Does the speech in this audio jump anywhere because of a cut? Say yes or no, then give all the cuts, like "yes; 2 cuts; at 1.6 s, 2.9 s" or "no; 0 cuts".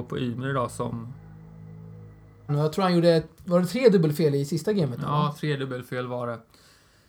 yes; 1 cut; at 2.5 s